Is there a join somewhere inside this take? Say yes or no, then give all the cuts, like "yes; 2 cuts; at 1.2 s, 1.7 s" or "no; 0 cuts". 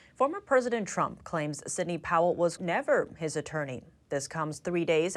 yes; 1 cut; at 2.6 s